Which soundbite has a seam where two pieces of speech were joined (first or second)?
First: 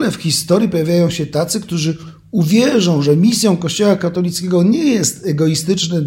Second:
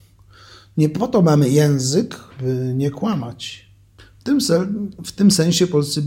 second